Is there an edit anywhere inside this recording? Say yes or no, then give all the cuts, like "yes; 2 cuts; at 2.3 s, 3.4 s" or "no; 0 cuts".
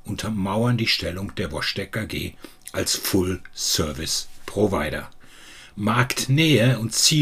no; 0 cuts